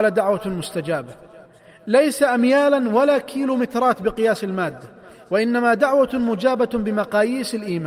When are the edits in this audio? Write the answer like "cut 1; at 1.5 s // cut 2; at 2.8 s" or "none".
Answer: none